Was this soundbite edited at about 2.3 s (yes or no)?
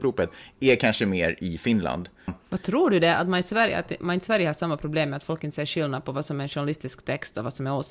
yes